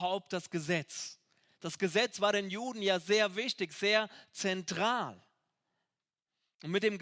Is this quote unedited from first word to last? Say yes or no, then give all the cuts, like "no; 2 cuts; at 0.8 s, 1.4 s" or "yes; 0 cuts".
yes; 0 cuts